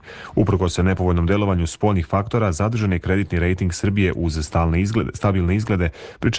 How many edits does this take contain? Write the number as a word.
zero